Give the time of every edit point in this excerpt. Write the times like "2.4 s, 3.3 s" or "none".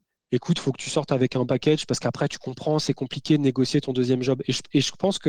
1.5 s